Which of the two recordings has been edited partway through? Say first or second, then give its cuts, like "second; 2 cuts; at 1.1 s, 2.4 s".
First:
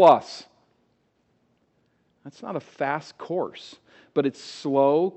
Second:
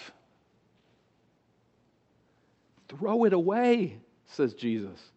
first; 1 cut; at 2.1 s